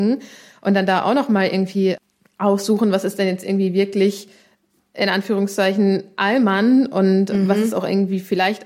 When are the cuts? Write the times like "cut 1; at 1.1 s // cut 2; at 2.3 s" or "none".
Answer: none